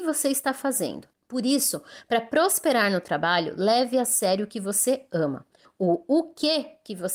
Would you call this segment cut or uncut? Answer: cut